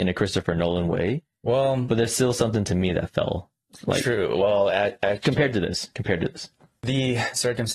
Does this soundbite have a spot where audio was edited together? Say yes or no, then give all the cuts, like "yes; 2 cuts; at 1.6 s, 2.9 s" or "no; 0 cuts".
no; 0 cuts